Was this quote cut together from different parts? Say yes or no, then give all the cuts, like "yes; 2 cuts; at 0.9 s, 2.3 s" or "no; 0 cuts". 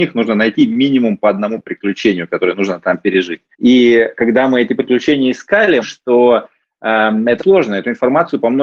yes; 3 cuts; at 3.5 s, 5.8 s, 7.4 s